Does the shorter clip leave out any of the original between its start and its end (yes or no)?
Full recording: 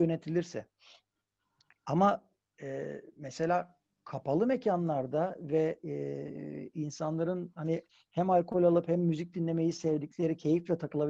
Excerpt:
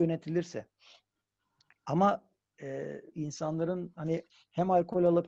yes